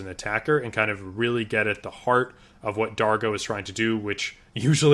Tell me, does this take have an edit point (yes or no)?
no